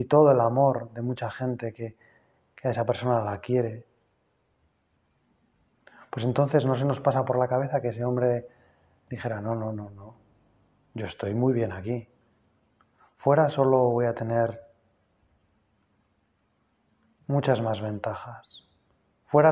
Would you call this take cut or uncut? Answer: uncut